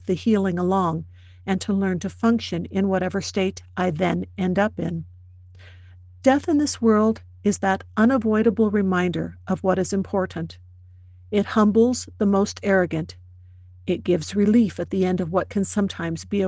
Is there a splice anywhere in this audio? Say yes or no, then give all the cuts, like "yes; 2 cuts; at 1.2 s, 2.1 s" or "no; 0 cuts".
no; 0 cuts